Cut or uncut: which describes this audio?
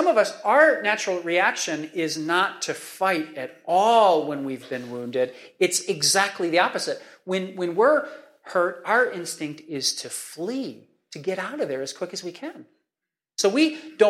uncut